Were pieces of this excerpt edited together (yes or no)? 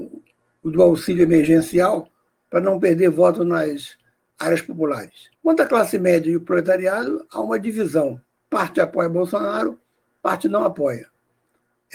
yes